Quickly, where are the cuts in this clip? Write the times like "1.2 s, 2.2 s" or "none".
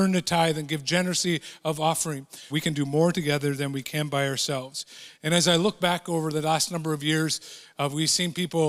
2.5 s

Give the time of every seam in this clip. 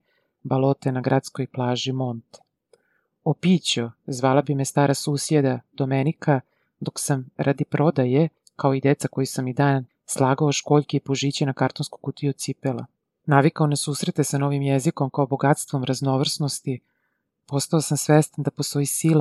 9.9 s, 13.2 s

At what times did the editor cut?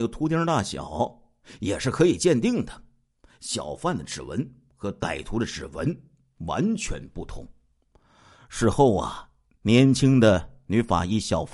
none

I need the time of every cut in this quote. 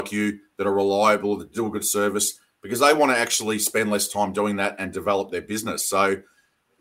none

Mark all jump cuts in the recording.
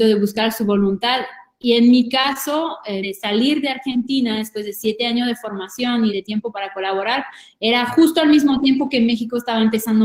3.0 s, 6.1 s

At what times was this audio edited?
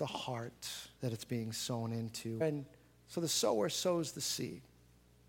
1.0 s, 2.4 s

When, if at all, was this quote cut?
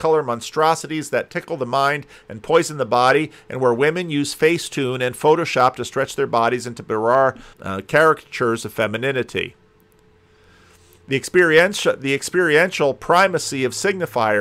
7.5 s

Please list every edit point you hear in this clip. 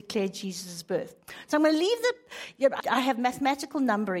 2.8 s

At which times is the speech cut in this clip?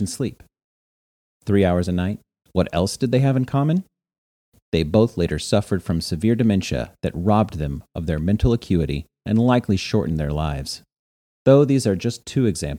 2.4 s

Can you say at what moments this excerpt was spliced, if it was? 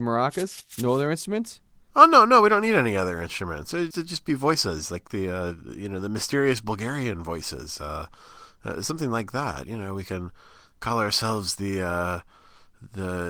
3.9 s

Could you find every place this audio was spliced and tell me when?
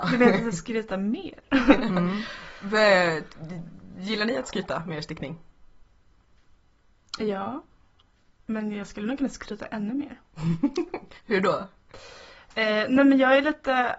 none

